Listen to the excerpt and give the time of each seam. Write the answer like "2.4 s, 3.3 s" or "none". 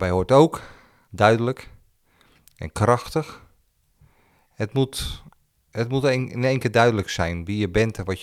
1.0 s